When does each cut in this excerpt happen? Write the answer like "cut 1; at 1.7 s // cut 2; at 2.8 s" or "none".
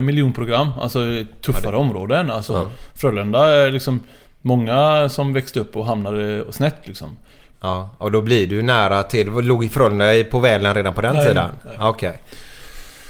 cut 1; at 7.5 s

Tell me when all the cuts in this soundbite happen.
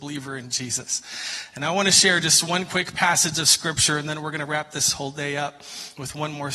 none

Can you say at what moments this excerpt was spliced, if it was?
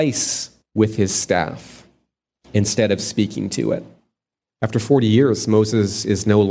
cut 1; at 4.5 s

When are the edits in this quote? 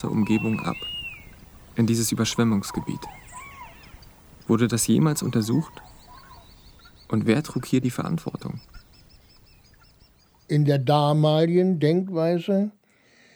none

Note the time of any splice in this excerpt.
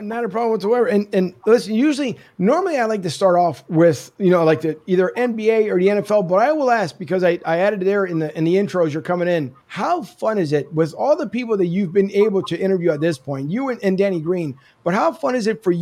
cut 1; at 9.6 s

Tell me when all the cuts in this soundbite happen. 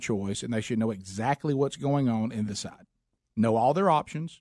cut 1; at 2.5 s

